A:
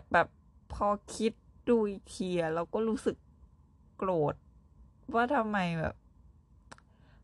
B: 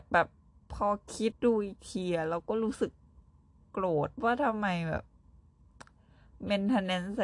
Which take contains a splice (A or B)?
B